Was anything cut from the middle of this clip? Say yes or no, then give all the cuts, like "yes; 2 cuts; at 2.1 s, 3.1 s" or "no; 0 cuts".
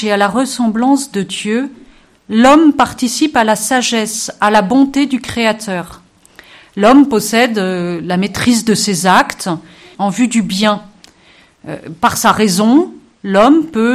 yes; 1 cut; at 9.9 s